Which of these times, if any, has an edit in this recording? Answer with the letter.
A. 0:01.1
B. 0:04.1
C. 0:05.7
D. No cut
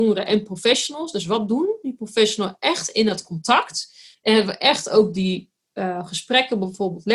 D